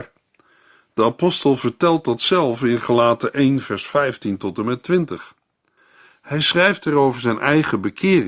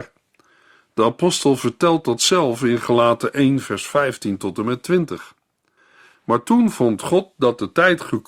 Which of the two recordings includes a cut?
second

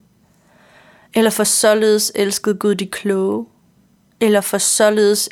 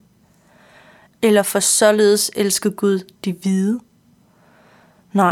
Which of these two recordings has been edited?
second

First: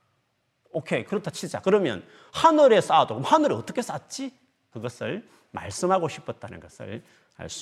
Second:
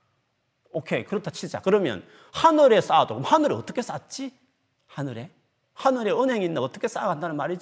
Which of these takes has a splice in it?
first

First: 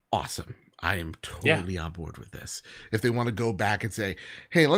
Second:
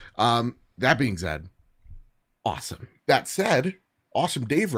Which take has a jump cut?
second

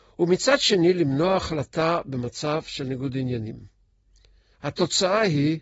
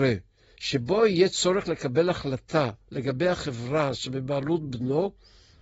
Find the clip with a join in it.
first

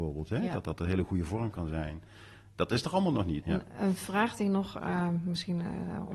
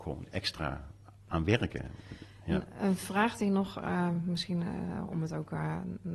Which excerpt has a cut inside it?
first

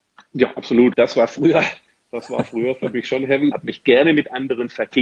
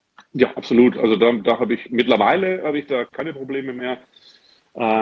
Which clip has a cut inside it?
first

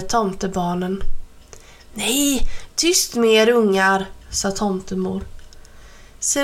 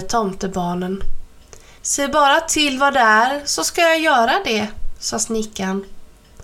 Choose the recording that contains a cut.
second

